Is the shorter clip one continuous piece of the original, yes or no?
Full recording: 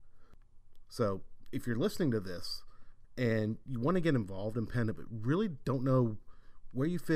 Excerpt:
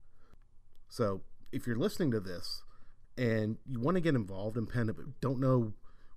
no